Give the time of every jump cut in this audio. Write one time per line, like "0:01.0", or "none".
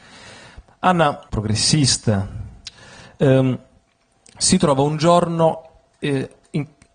0:01.3

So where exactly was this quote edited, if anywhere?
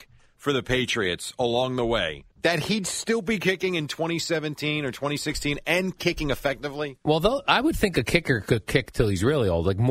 0:02.3

